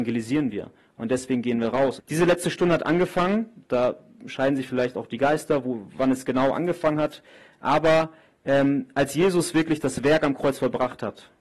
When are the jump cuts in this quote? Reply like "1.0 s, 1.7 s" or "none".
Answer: 2.0 s